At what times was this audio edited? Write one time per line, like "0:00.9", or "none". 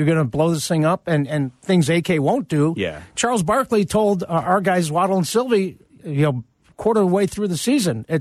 none